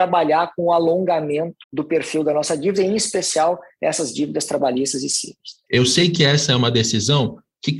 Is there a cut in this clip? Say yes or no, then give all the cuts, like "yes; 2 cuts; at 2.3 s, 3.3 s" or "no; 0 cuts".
yes; 2 cuts; at 1.6 s, 5.7 s